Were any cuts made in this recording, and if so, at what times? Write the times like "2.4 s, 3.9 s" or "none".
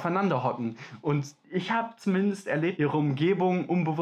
1.4 s, 2.8 s